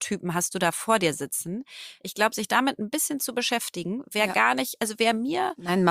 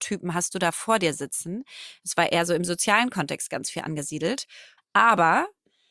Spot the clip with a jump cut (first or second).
second